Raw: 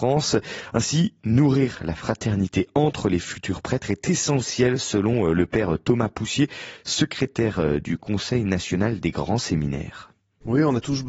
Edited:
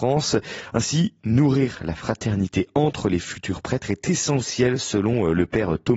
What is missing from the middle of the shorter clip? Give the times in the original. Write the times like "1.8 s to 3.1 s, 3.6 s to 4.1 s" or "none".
none